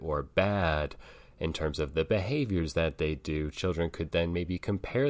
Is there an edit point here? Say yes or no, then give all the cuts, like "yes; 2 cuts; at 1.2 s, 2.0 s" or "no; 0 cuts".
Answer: no; 0 cuts